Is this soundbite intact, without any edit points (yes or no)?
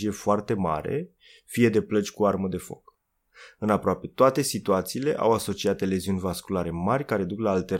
yes